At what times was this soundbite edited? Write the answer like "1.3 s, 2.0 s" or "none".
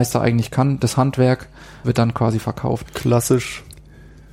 1.8 s, 2.8 s